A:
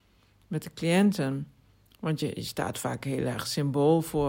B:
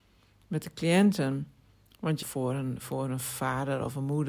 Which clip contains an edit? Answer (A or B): B